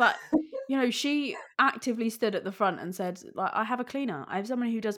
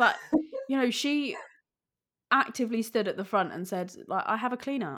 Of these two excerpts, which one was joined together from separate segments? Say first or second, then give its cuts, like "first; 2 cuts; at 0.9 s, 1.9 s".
first; 1 cut; at 1.5 s